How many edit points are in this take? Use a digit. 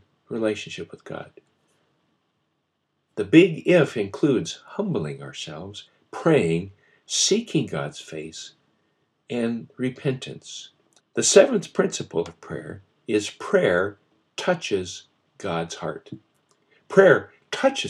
2